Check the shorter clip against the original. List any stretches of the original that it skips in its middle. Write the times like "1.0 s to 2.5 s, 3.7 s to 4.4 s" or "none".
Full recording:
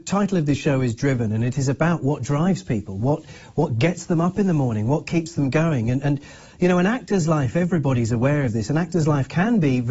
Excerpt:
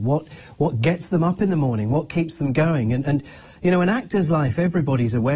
none